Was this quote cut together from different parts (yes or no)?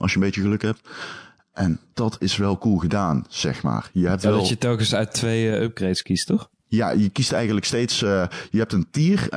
no